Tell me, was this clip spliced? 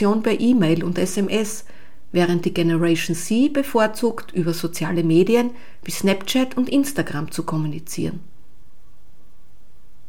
no; 0 cuts

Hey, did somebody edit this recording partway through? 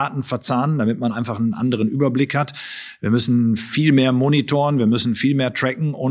no; 0 cuts

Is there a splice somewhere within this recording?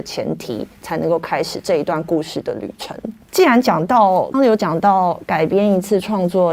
yes; 2 cuts; at 3.2 s, 4.3 s

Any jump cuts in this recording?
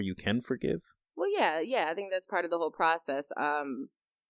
yes; 1 cut; at 1.0 s

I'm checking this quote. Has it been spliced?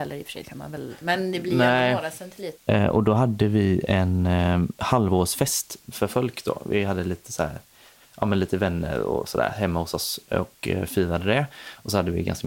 yes; 1 cut; at 2.6 s

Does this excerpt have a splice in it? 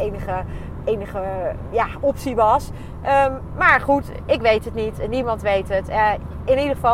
no; 0 cuts

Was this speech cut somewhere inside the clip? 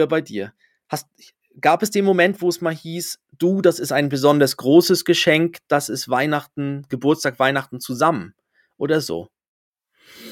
yes; 1 cut; at 5.7 s

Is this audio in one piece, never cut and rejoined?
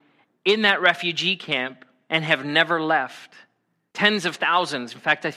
no; 1 cut; at 3.9 s

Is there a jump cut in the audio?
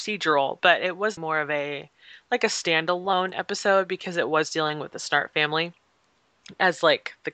yes; 1 cut; at 1.2 s

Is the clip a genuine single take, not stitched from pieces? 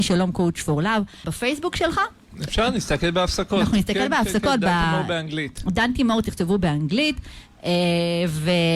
no; 1 cut; at 1.2 s

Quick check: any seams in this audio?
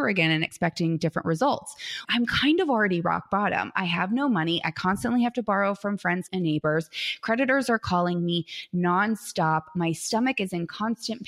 yes; 2 cuts; at 2.0 s, 6.3 s

